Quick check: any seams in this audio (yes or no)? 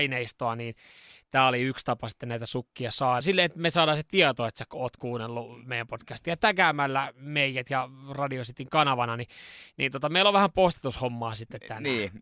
yes